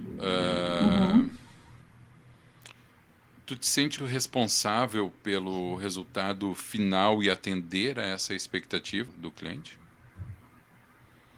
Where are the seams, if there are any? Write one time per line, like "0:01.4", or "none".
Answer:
0:04.0
0:09.1